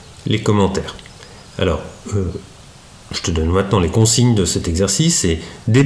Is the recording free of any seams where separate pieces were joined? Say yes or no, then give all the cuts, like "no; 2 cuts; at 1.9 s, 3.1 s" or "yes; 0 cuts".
yes; 0 cuts